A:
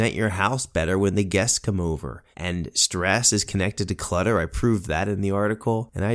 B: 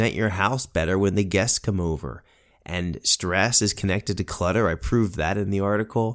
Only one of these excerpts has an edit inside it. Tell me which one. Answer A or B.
A